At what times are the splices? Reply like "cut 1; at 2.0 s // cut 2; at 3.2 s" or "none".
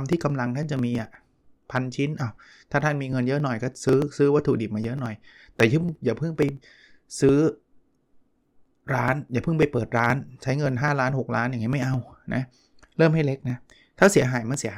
none